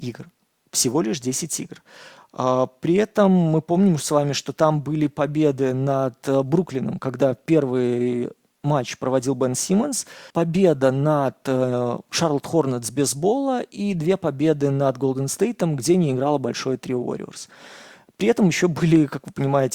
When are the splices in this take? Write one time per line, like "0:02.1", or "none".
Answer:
0:10.3